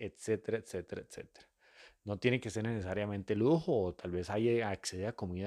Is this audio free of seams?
yes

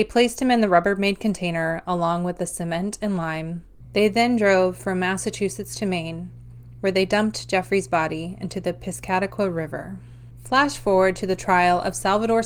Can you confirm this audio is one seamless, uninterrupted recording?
yes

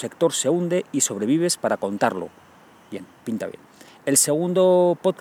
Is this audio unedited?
yes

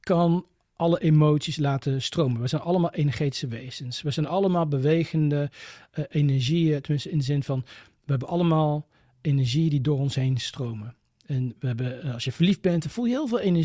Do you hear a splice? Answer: no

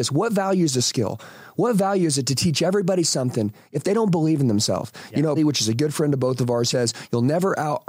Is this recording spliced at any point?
yes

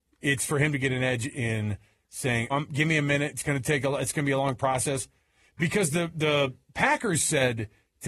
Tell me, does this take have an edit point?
yes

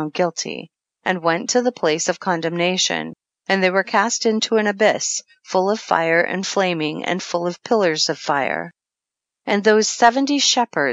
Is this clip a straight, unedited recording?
yes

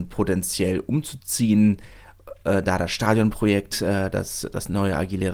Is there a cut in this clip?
no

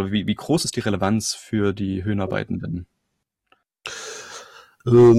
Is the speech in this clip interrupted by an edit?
no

